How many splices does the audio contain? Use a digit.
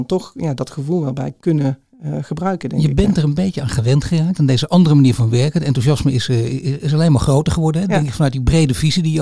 1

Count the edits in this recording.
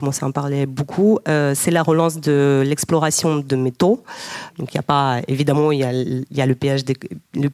1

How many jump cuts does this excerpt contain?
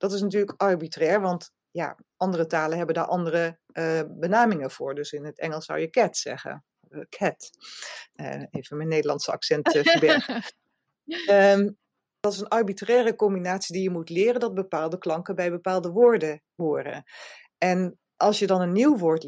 0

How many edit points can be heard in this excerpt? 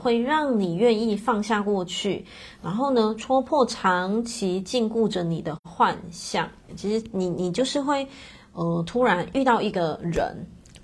1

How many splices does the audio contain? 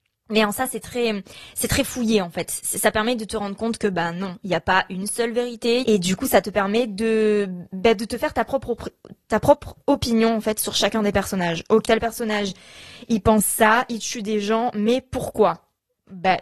3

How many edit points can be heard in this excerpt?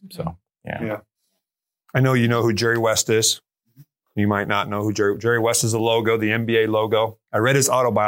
0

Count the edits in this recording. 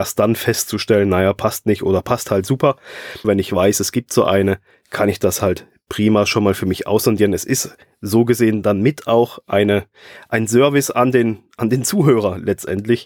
1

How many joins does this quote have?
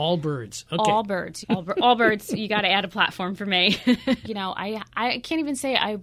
2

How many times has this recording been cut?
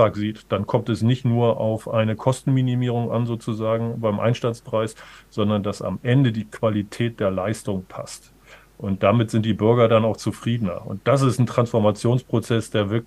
0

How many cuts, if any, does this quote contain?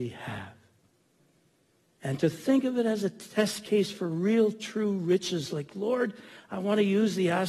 0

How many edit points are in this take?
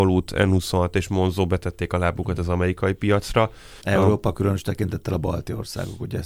1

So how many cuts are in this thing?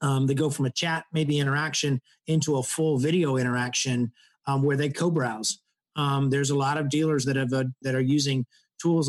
2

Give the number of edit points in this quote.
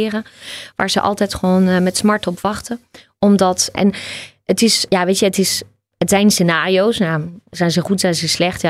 2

